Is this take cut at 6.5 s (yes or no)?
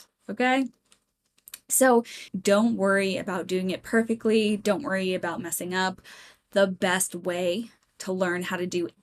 no